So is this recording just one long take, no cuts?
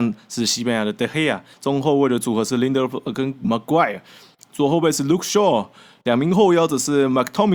no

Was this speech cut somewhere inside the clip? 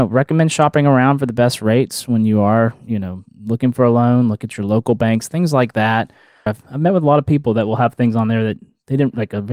yes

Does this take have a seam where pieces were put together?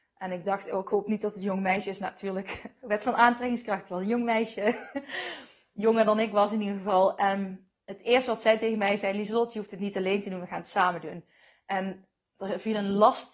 no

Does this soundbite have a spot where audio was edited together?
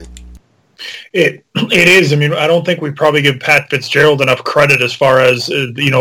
no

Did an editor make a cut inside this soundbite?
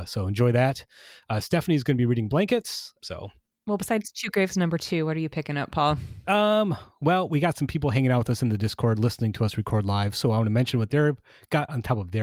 yes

